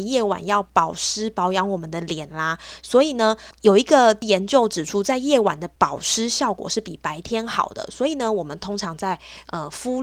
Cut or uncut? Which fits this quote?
uncut